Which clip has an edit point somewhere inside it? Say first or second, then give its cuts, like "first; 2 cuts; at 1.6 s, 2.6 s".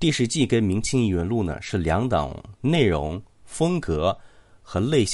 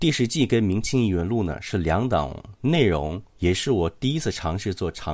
second; 1 cut; at 3.3 s